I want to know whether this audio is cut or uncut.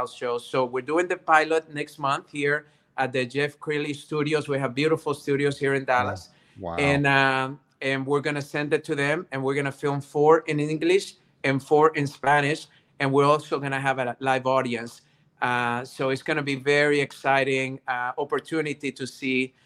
uncut